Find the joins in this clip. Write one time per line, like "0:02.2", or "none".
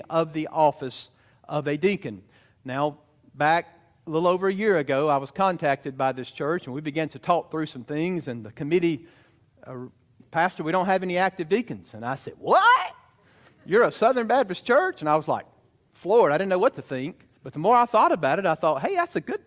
0:10.2
0:17.4